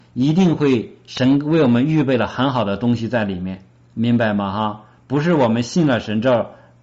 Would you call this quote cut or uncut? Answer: uncut